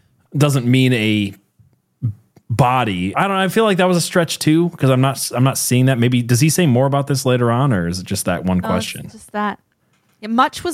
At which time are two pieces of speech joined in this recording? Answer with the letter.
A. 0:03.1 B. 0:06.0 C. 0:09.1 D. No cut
A